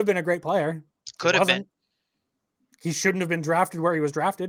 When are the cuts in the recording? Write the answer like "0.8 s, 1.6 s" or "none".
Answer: none